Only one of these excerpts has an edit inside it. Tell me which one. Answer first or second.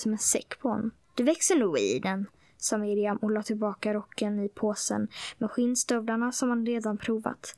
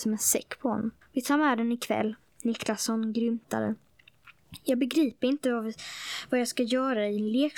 second